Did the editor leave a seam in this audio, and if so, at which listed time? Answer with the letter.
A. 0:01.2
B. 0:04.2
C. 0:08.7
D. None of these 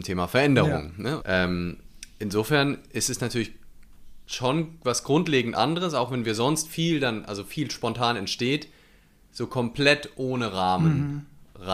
A